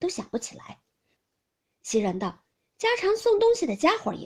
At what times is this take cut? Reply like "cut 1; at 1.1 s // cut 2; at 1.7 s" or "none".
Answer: cut 1; at 1.2 s